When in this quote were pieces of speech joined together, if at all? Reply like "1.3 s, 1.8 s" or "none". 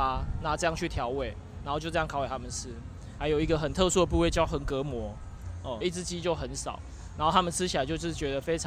3.2 s, 5.8 s